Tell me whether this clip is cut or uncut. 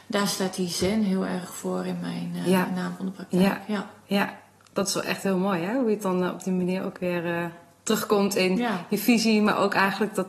uncut